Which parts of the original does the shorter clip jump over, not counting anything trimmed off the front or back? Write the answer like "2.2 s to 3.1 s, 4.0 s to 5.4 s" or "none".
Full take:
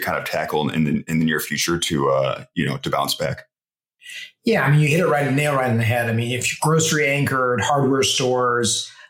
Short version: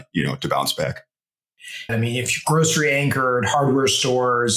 4.3 s to 6.0 s